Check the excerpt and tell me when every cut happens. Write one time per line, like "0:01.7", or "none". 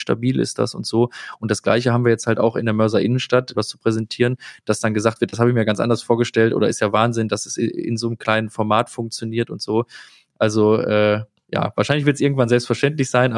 0:03.5

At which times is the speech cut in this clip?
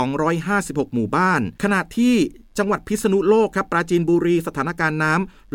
0:01.5

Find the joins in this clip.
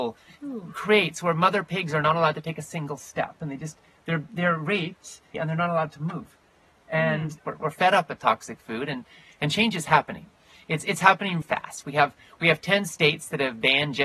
0:05.3
0:07.4
0:11.4

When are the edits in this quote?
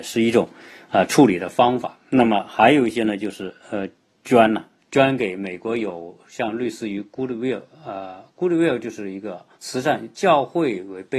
0:04.8
0:09.5

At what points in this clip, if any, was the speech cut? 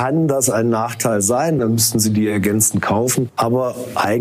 0:01.6

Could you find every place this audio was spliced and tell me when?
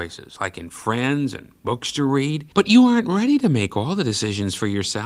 0:02.5

